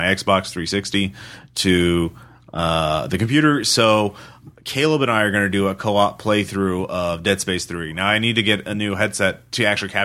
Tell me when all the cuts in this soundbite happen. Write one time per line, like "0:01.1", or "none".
none